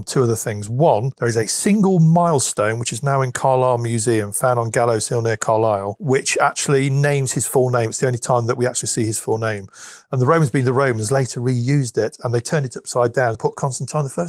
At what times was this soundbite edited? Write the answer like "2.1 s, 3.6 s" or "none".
13.3 s